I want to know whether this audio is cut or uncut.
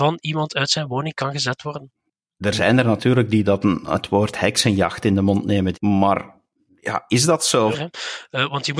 cut